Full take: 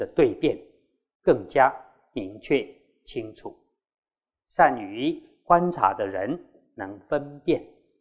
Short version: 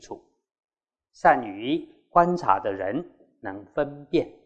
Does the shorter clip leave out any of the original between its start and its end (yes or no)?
no